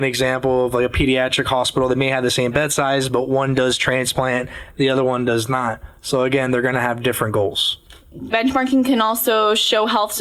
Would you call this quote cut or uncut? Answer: uncut